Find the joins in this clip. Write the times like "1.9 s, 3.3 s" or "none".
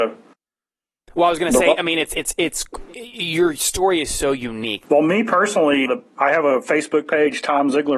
4.8 s, 5.9 s